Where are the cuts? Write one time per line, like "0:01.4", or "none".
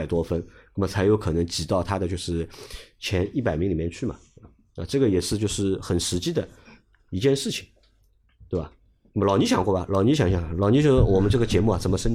none